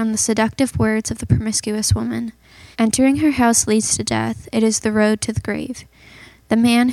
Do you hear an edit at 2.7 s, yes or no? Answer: yes